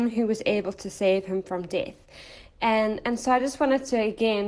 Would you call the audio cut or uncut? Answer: uncut